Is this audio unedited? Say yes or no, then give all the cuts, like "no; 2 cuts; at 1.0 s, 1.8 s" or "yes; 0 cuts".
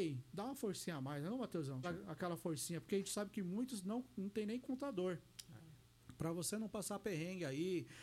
no; 1 cut; at 1.8 s